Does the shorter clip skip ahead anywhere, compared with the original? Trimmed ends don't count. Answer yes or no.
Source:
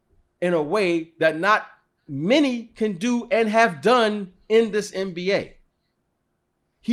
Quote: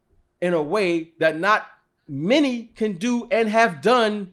no